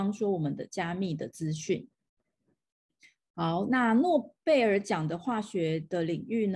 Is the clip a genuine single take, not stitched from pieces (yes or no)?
yes